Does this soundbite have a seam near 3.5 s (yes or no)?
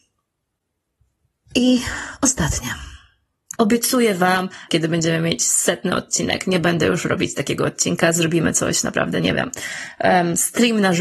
yes